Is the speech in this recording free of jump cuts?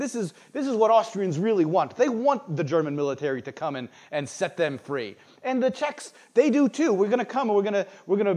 yes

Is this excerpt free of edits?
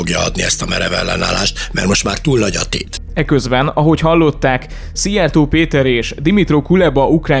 yes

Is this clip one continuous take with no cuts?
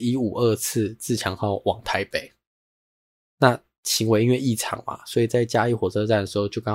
yes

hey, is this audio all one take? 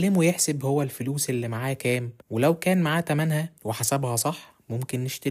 no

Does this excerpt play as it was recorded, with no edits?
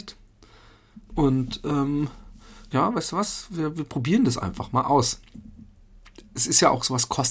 no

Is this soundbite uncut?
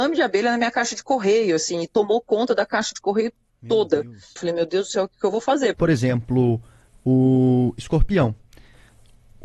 no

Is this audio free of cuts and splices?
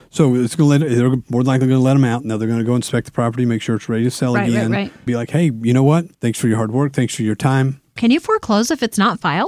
no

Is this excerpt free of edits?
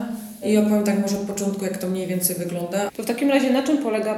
no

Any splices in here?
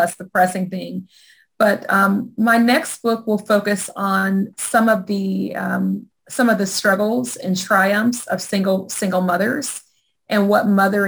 no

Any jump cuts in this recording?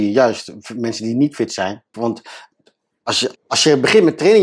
yes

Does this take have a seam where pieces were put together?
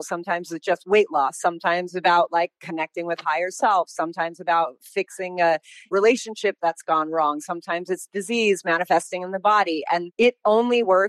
no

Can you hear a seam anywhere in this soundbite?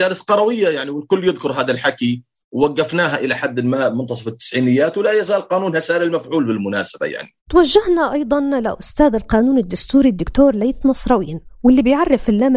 yes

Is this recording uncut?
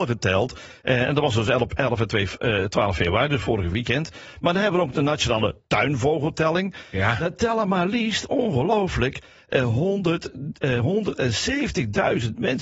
yes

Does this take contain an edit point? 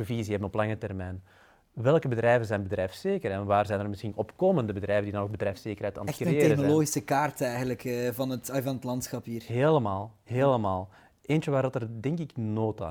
no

